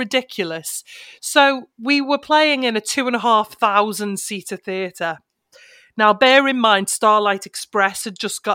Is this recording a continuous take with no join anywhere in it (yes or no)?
yes